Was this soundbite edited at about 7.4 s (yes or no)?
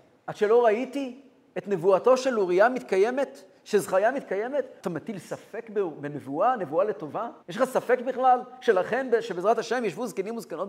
yes